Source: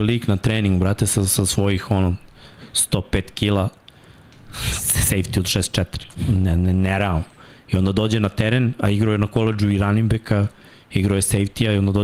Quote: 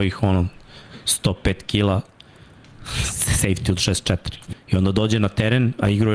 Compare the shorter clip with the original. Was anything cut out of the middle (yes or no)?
yes